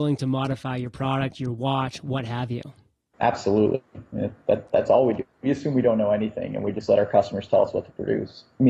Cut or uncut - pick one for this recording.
uncut